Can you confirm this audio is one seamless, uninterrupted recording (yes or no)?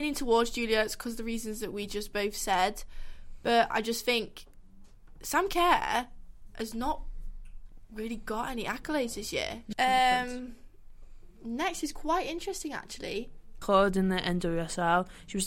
no